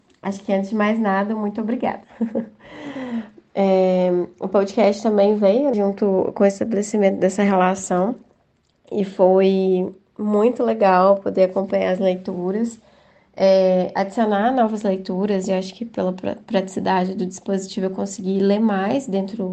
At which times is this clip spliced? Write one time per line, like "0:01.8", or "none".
0:02.0
0:05.7